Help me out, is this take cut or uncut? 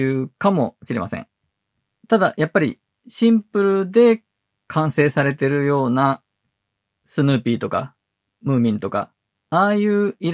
cut